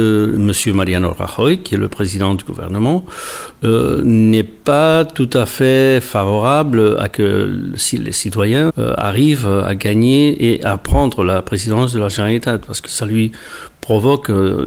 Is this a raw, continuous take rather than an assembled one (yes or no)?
no